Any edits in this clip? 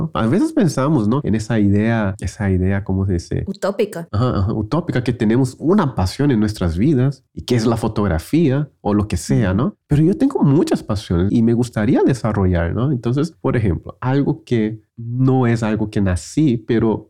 yes; 2 cuts; at 11.3 s, 14.9 s

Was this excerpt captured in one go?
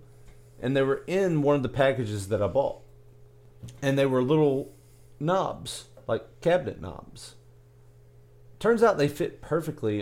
yes; 0 cuts

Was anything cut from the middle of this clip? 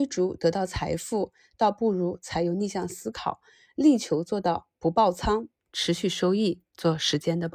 yes; 1 cut; at 5.7 s

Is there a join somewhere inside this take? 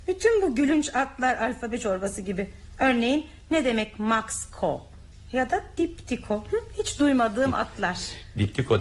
no; 0 cuts

